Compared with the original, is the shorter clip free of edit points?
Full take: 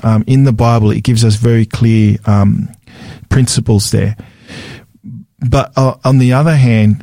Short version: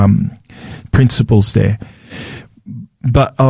yes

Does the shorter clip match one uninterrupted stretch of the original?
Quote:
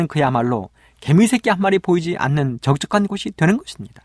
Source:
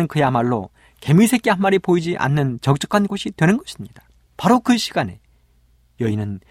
yes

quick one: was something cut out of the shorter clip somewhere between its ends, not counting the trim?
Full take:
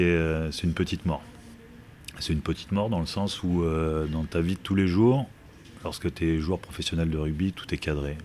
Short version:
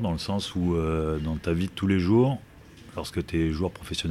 no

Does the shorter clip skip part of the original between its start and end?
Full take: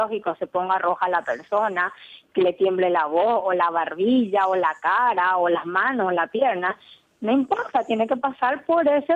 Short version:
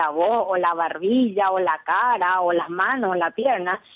no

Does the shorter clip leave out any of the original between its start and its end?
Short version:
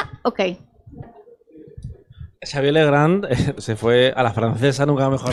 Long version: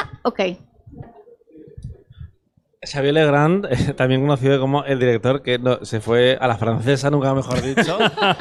yes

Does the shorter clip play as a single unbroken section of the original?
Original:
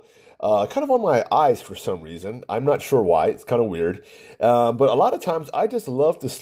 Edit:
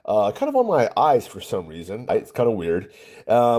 no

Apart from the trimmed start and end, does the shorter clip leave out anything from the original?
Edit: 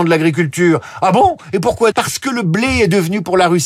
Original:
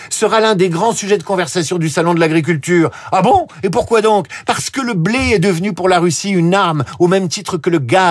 yes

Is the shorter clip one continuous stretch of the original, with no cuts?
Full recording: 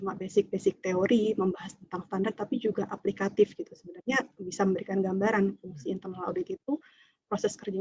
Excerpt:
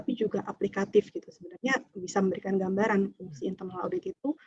yes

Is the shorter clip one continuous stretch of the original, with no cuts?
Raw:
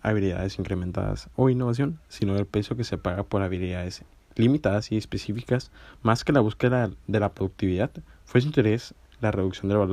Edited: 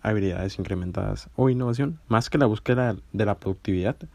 no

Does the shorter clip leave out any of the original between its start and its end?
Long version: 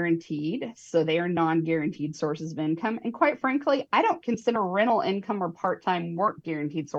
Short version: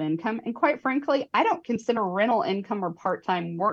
no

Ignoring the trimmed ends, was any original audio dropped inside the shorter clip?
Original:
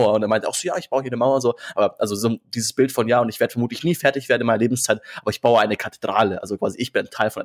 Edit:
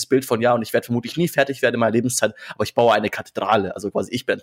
no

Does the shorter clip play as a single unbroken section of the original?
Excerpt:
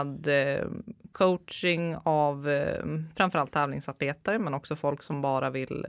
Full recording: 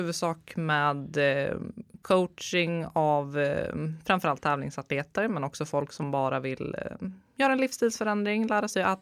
yes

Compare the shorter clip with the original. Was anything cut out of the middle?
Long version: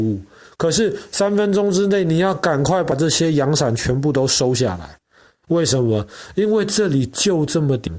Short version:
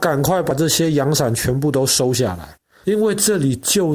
yes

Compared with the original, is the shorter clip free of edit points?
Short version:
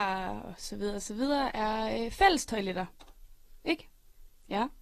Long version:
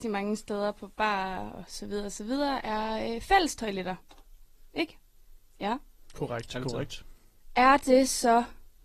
yes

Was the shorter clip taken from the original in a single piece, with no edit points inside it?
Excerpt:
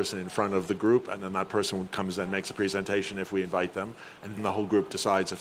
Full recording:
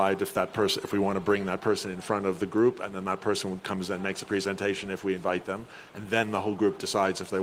no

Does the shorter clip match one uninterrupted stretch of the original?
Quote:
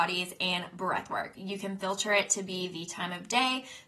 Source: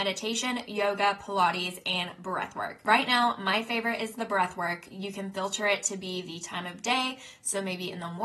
no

